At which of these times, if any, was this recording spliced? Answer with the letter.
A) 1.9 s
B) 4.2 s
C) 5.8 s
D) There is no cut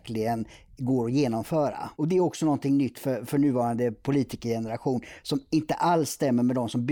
A